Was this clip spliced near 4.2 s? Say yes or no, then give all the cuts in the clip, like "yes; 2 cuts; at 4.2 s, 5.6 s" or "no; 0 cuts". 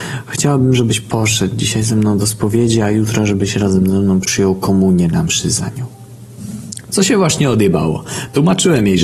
yes; 1 cut; at 4.2 s